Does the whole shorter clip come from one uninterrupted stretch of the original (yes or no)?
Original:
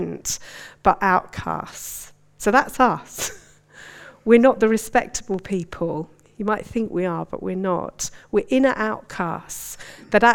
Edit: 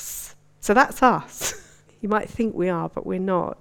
no